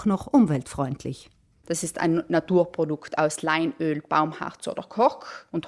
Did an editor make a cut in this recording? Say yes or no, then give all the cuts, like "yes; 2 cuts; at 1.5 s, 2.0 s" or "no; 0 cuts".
no; 0 cuts